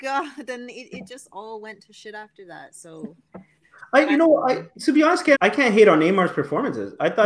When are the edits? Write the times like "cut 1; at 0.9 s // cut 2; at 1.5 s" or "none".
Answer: cut 1; at 5.3 s